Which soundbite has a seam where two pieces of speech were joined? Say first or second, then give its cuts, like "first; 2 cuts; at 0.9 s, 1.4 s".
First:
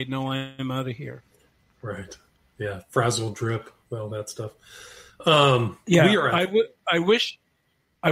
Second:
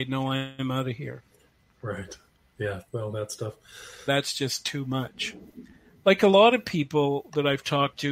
second; 2 cuts; at 2.9 s, 4.1 s